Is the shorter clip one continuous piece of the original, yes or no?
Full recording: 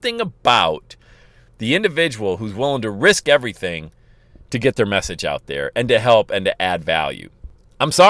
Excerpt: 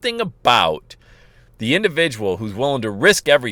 yes